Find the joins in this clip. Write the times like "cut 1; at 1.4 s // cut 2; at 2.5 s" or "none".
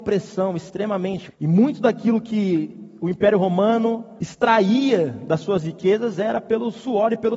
cut 1; at 1.3 s // cut 2; at 4.2 s